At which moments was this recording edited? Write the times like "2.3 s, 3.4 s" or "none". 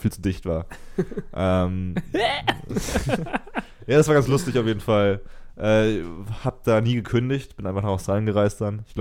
none